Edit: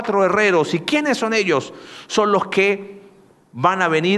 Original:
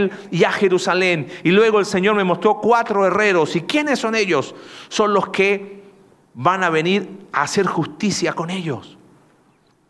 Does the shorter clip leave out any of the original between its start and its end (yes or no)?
no